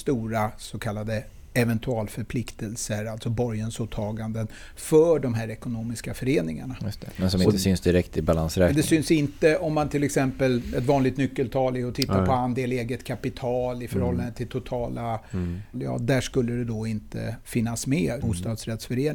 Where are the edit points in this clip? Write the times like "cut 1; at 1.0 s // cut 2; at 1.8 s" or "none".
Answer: cut 1; at 15.7 s // cut 2; at 18.2 s

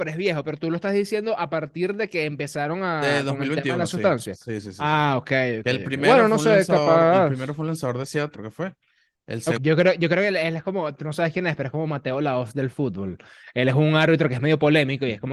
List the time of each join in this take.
cut 1; at 8.3 s // cut 2; at 9.6 s

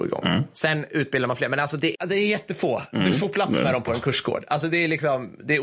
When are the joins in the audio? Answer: cut 1; at 1.9 s

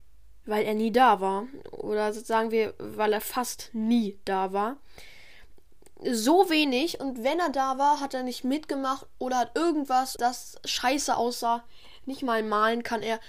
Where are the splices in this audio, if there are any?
cut 1; at 10.2 s

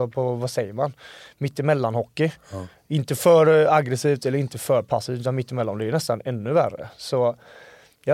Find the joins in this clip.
none

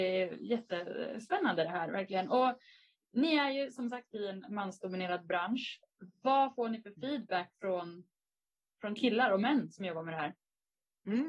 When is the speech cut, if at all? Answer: none

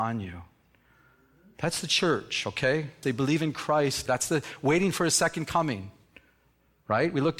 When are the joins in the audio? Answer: cut 1; at 3.0 s // cut 2; at 4.1 s

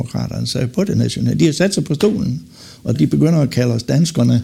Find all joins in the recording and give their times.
cut 1; at 2.9 s

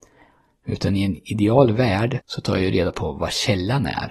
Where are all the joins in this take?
cut 1; at 2.2 s

